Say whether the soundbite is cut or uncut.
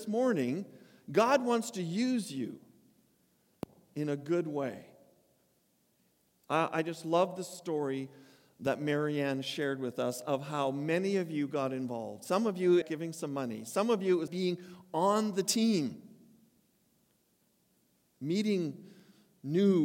cut